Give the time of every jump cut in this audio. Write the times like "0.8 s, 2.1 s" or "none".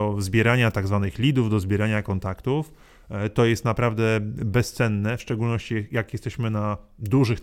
none